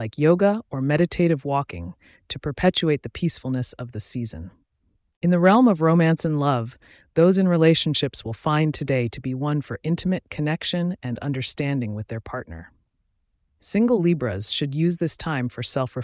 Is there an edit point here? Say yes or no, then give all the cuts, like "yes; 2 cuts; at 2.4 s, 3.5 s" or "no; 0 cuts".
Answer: no; 0 cuts